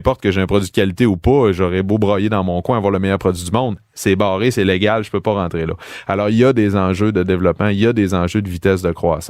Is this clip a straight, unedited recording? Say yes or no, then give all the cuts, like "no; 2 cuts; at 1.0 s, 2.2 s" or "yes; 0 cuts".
yes; 0 cuts